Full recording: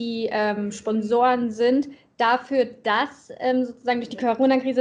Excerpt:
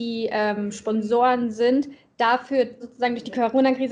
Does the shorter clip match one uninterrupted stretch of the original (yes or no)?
no